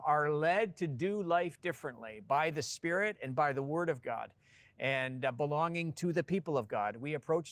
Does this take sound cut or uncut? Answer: uncut